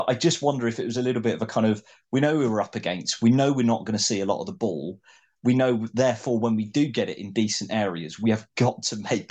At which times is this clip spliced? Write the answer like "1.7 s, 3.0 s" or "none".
none